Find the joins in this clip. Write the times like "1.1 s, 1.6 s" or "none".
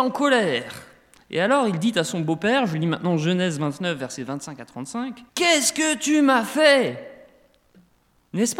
5.3 s